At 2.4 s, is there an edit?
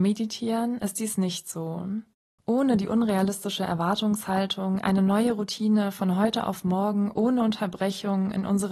yes; 1 cut; at 2.4 s

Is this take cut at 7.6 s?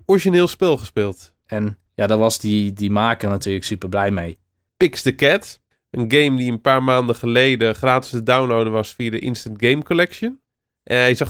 no; 2 cuts; at 1.5 s, 4.7 s

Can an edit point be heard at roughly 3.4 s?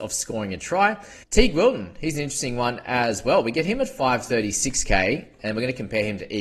no; 1 cut; at 1.2 s

